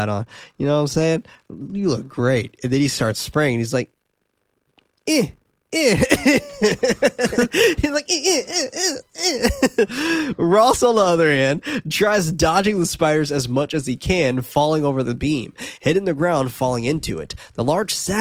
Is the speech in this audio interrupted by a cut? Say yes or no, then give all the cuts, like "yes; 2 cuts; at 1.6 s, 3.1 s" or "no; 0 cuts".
no; 0 cuts